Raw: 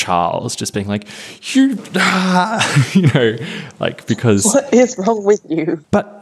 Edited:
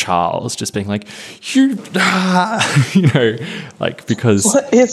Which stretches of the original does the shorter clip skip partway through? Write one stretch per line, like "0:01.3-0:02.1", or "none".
none